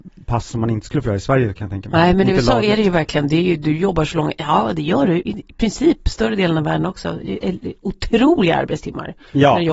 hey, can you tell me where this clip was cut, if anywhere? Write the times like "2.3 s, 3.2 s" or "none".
none

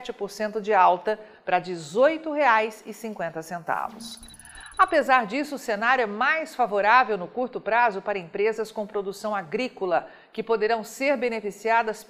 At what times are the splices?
none

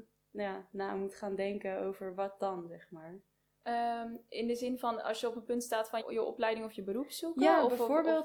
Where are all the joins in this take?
6.0 s

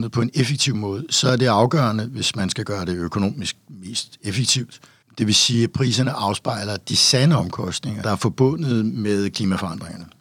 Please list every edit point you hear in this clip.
5.0 s, 8.0 s

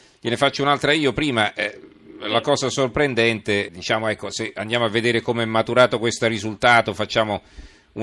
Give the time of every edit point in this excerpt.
3.7 s

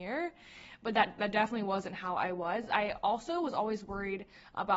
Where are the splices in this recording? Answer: none

